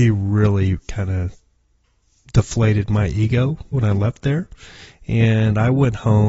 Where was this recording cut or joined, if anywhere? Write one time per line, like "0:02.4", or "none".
0:03.7